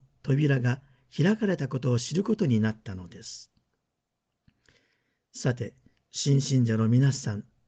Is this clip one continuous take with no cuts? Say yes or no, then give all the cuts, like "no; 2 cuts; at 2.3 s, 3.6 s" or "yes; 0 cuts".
yes; 0 cuts